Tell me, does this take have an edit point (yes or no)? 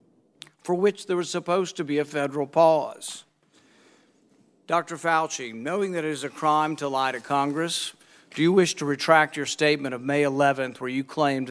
no